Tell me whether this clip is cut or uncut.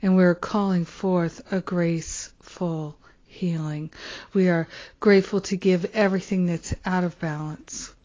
cut